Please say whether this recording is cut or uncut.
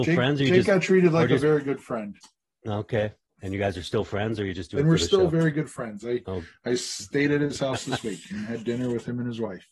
uncut